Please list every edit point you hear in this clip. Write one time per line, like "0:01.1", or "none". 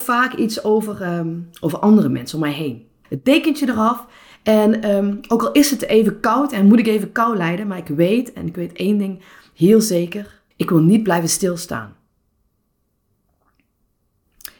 0:03.0
0:10.5